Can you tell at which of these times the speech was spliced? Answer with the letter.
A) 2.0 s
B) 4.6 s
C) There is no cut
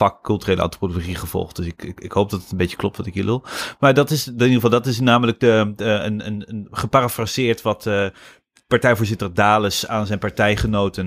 A